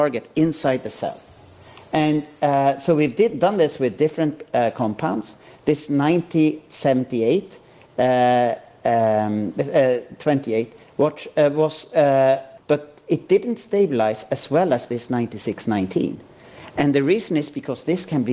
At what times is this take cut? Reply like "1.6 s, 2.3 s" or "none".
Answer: 12.6 s